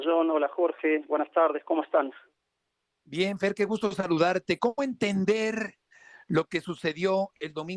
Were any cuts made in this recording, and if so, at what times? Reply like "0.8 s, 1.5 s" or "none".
none